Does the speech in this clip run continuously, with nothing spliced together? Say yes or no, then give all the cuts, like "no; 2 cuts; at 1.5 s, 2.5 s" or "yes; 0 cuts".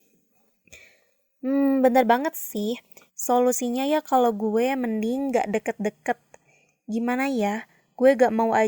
no; 1 cut; at 3.1 s